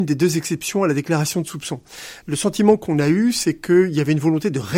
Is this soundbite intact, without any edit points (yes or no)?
no